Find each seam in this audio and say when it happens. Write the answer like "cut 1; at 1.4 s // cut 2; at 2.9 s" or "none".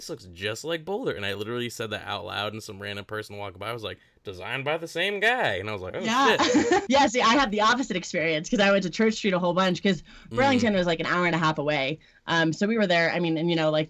cut 1; at 6.9 s

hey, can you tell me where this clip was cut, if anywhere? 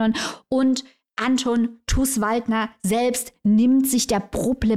none

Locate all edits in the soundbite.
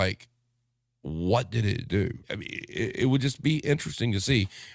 cut 1; at 2.2 s

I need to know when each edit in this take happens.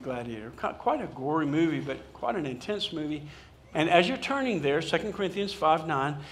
cut 1; at 3.7 s

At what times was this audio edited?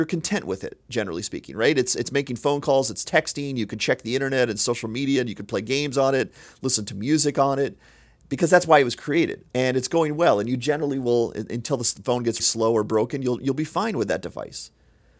cut 1; at 9.5 s // cut 2; at 12.4 s

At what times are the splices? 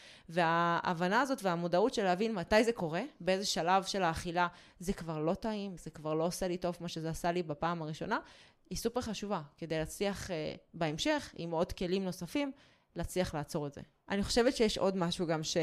cut 1; at 5.8 s

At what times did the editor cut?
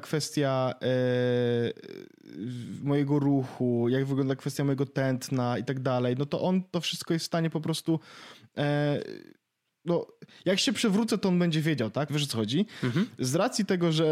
cut 1; at 12.1 s

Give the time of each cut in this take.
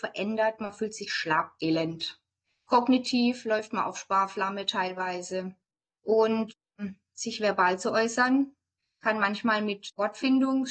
cut 1; at 1.6 s // cut 2; at 6.0 s

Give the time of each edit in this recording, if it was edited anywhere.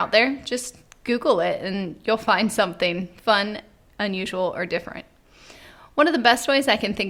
none

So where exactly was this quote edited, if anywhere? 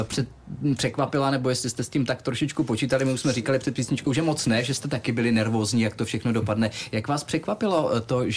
none

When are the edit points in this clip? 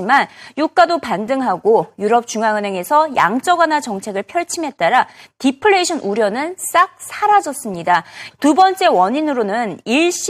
cut 1; at 8.3 s

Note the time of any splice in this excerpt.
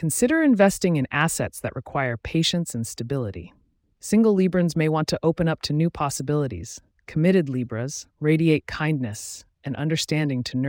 cut 1; at 3.8 s // cut 2; at 6.9 s // cut 3; at 8.1 s

